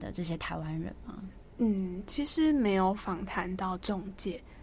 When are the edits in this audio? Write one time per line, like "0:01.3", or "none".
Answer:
none